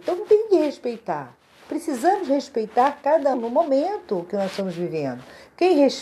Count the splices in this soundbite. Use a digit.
1